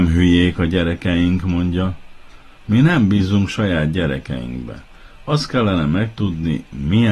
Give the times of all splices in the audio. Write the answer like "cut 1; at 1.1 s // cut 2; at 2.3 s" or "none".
none

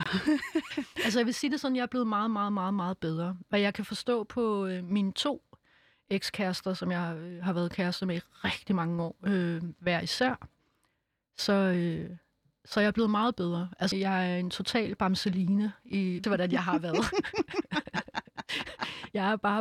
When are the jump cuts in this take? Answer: cut 1; at 13.9 s // cut 2; at 16.2 s

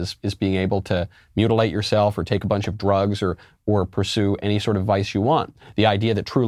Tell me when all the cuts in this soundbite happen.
none

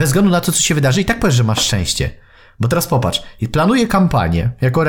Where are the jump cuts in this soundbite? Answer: none

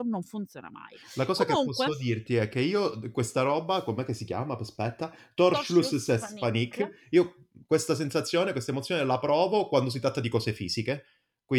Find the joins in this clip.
none

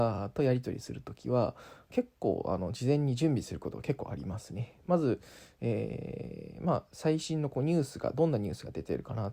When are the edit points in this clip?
none

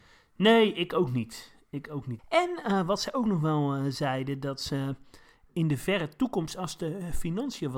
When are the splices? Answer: cut 1; at 2.2 s

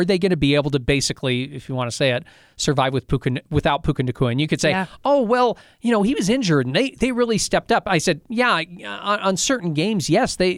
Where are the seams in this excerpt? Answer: none

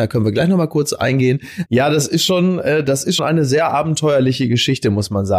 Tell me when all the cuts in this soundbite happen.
cut 1; at 1.7 s // cut 2; at 3.2 s

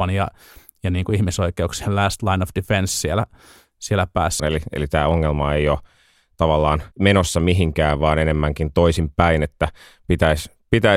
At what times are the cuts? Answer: cut 1; at 4.4 s // cut 2; at 6.9 s

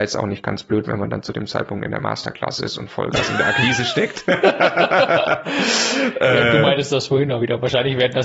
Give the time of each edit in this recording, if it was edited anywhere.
none

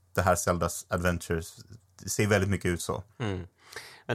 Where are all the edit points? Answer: cut 1; at 3.1 s

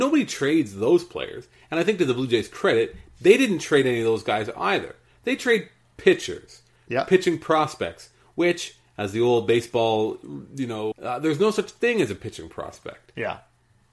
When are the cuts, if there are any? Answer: cut 1; at 10.9 s

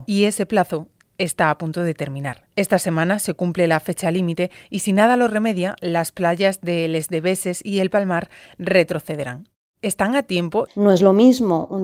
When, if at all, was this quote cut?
cut 1; at 10.7 s

